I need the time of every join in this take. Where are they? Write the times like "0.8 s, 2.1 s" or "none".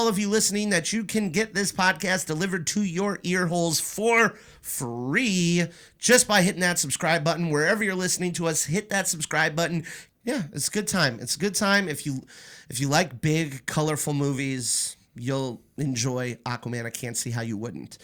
10.1 s